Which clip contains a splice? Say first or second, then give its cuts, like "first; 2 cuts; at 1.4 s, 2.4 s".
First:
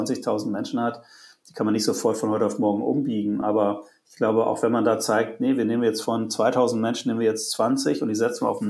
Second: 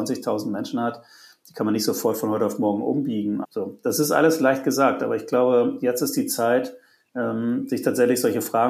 second; 1 cut; at 3.4 s